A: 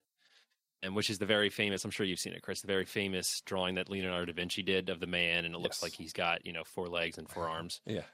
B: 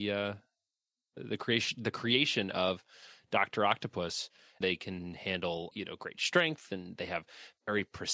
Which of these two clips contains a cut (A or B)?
B